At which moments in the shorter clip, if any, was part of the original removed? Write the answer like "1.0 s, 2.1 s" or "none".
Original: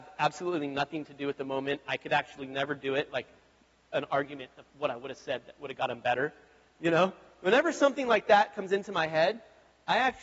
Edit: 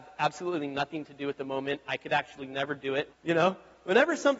3.1 s